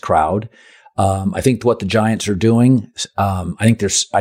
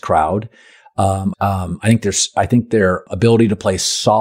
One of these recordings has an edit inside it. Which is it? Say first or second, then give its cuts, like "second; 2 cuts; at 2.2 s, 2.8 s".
second; 2 cuts; at 1.3 s, 3.1 s